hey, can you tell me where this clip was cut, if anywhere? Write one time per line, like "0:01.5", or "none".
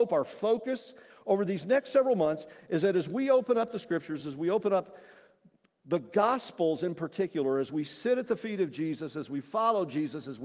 none

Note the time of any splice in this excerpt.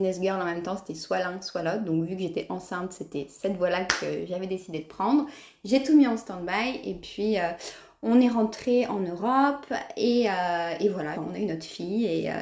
0:11.1

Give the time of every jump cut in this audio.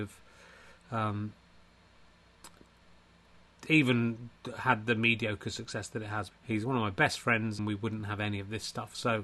0:06.3
0:07.6

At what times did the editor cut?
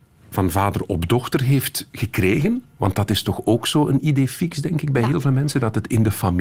none

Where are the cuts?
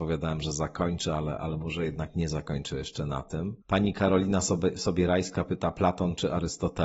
0:03.6

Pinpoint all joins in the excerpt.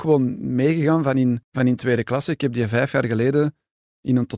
0:01.4

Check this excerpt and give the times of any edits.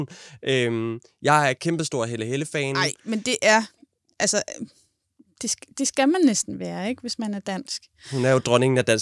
none

